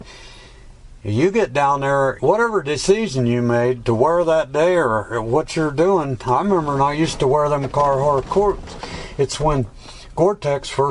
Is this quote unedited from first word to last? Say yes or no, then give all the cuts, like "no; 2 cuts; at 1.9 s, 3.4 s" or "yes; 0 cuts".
no; 1 cut; at 2.2 s